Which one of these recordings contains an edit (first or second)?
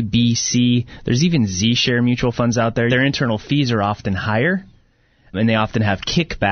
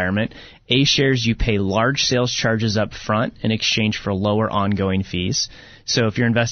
first